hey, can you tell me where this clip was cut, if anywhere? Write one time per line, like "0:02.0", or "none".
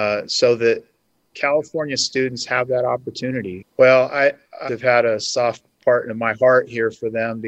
0:03.6
0:04.7